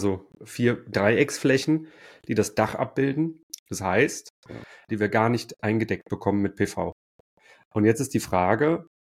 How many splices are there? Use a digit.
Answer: 2